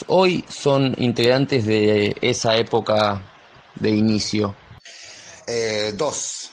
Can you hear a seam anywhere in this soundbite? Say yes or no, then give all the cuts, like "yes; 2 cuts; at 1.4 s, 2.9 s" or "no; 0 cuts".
no; 0 cuts